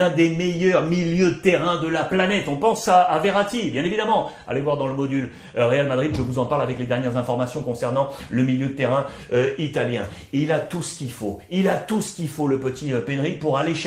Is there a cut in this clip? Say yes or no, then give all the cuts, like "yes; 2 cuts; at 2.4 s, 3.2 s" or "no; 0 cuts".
no; 0 cuts